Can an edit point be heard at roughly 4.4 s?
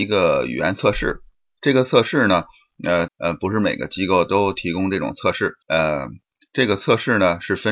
no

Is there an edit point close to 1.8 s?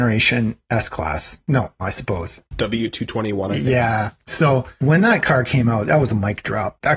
yes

